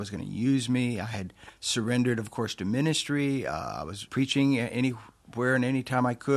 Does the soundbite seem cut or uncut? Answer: cut